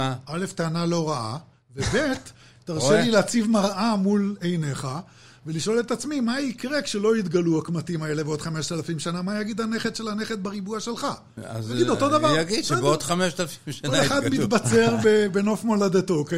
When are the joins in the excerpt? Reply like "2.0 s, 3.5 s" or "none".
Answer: none